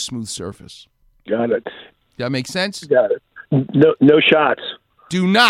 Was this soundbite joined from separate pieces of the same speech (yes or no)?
no